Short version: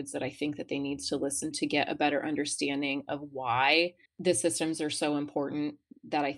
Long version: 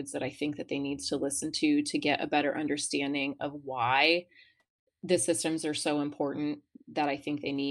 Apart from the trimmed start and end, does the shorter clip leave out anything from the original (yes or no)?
yes